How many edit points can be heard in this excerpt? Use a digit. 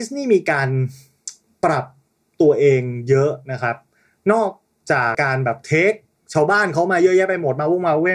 1